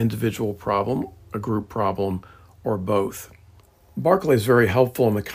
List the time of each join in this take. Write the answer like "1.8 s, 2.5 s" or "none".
none

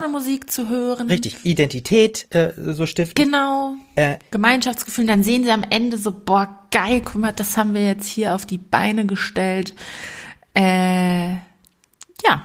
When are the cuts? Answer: none

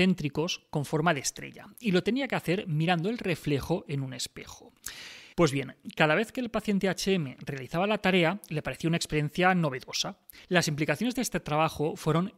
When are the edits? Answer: 5.3 s, 10.4 s

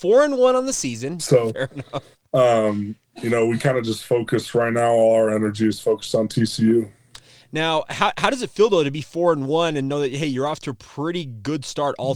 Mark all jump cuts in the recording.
1.2 s

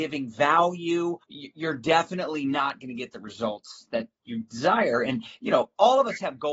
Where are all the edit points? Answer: 1.2 s

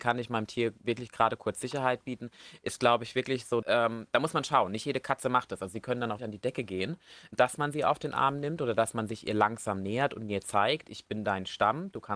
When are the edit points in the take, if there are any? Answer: 3.6 s, 6.2 s

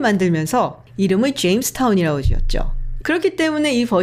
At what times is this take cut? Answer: 3.0 s

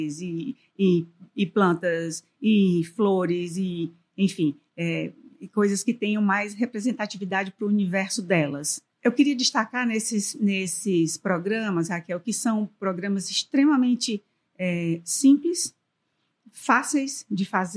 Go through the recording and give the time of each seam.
8.9 s

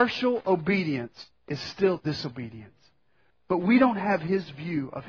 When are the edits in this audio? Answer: 1.4 s, 3.3 s

